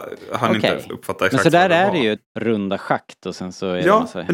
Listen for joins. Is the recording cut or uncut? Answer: cut